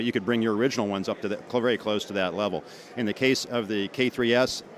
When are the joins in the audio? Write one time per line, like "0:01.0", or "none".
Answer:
none